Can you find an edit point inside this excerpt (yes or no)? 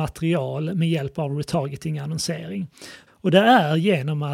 yes